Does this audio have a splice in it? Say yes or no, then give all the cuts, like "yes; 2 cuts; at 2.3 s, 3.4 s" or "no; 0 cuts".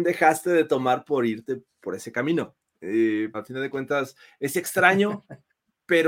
yes; 1 cut; at 3.3 s